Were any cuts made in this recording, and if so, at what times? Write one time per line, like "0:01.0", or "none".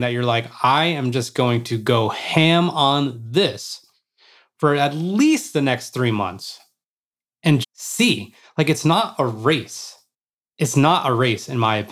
0:07.6

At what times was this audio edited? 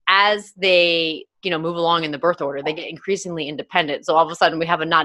0:01.3

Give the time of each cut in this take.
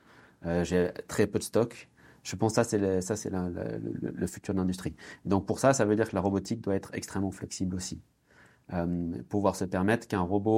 none

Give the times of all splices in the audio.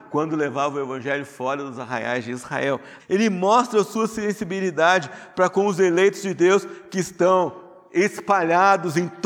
0:03.0

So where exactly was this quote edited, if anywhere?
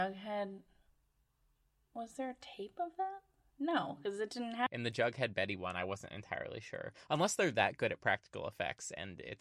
0:04.7

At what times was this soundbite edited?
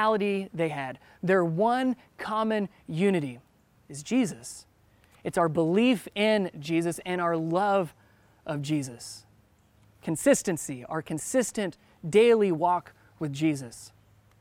0:03.7

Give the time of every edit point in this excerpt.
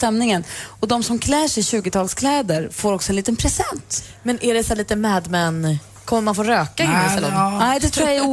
none

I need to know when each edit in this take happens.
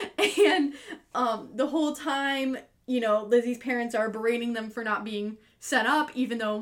none

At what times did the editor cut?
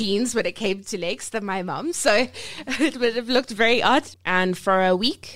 0:04.1

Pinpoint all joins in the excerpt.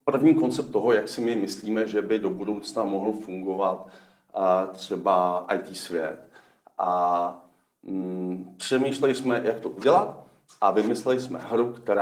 none

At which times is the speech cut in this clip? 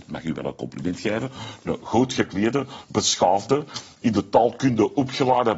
none

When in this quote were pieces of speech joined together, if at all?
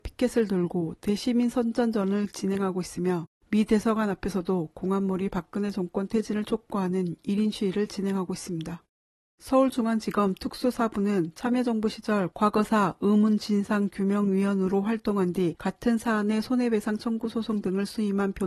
none

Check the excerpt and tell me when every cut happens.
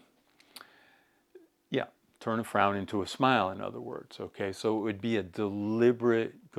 none

